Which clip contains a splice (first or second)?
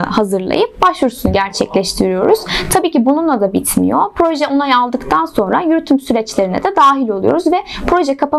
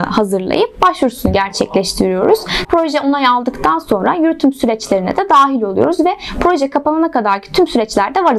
second